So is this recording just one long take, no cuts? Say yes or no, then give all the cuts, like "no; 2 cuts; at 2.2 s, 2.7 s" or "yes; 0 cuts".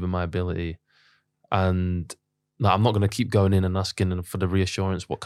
yes; 0 cuts